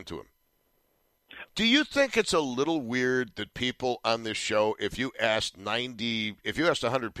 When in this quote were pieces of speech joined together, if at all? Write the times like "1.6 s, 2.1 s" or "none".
1.5 s